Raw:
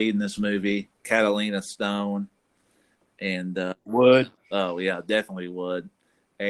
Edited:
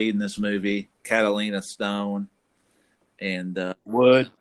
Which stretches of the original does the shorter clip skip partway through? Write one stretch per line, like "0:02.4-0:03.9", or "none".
none